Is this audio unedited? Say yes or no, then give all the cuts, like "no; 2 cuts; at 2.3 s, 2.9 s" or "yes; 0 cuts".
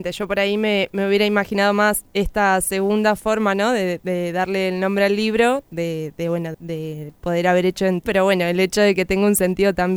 no; 2 cuts; at 6.5 s, 8.1 s